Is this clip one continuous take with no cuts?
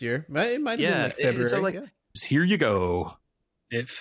no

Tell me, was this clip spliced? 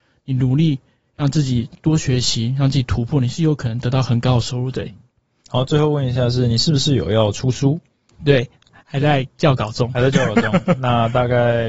yes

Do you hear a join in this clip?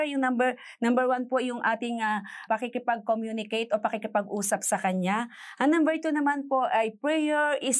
yes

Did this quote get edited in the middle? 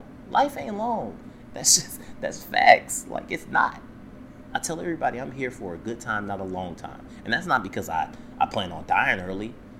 yes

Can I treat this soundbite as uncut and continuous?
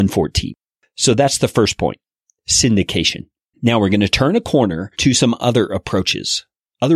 no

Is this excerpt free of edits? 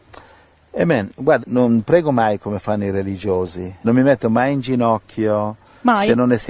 no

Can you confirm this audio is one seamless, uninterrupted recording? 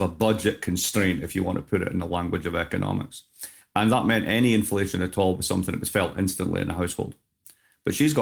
no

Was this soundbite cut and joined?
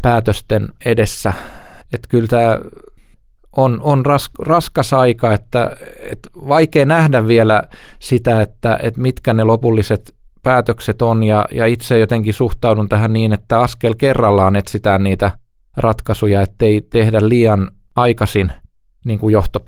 no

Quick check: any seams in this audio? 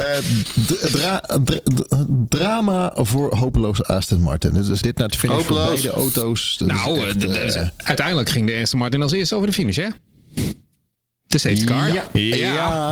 yes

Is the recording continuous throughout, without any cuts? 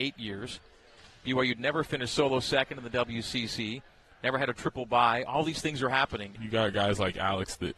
no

